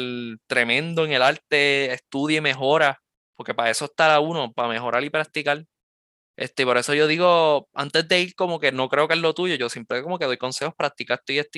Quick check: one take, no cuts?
yes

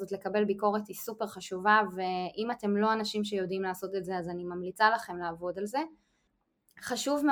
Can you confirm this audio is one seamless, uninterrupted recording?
yes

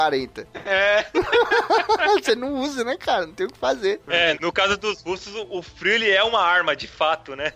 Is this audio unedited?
no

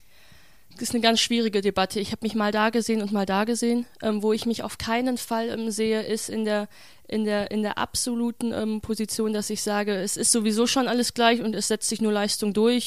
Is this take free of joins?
yes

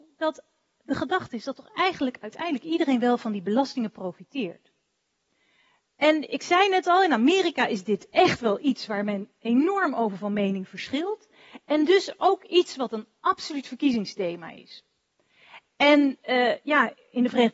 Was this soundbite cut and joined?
no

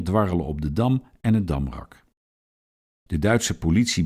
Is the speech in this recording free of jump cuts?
yes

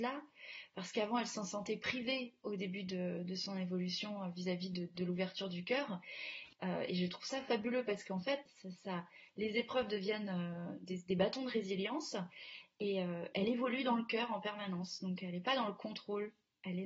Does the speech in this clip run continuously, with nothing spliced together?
no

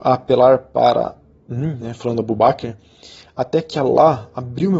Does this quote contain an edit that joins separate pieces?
no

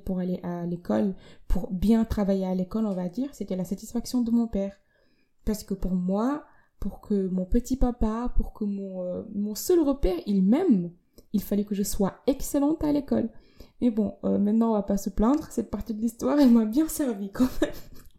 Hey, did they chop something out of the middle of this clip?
no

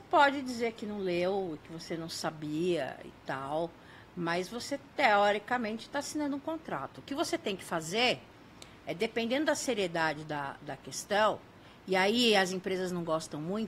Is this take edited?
no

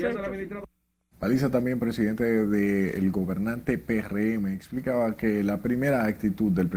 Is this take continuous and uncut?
no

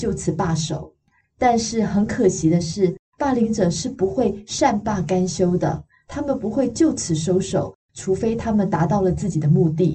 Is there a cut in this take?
no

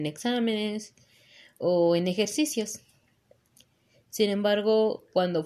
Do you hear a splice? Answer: no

